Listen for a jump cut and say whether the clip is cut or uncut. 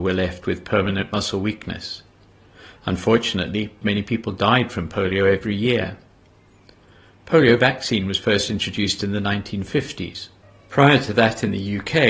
cut